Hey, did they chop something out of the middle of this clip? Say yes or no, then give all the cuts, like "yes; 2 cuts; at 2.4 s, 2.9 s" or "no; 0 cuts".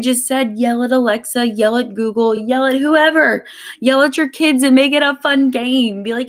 no; 0 cuts